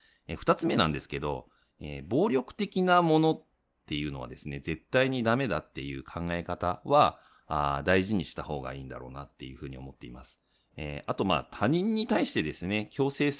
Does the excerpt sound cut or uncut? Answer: cut